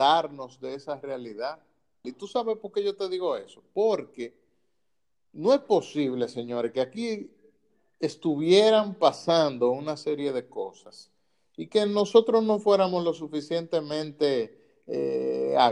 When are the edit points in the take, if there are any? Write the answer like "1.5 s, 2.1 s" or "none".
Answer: 2.0 s